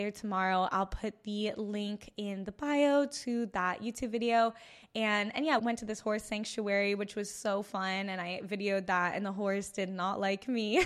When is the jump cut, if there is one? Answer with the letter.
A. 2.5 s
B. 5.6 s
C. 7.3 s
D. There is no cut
B